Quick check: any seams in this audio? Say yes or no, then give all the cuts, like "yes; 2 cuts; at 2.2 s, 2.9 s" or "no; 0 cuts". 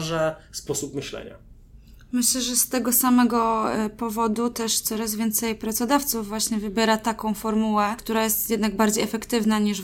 no; 0 cuts